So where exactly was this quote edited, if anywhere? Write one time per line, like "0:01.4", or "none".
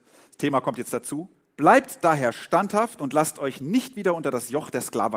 0:01.6